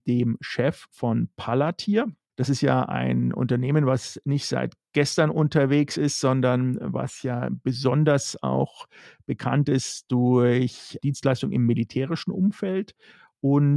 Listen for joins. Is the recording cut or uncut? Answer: cut